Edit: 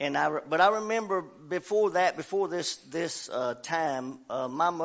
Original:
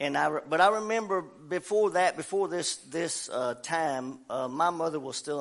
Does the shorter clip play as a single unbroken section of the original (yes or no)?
yes